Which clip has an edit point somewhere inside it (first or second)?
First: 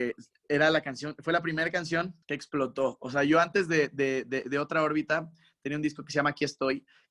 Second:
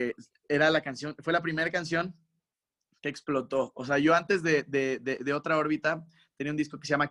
first